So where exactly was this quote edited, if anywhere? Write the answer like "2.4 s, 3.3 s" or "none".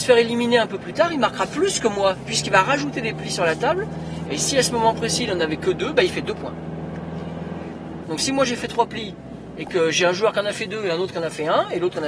2.3 s, 4.2 s, 8.0 s